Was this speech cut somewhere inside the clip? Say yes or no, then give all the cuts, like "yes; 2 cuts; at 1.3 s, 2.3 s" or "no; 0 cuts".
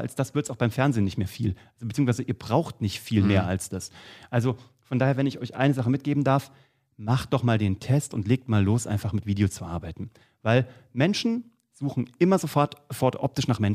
no; 0 cuts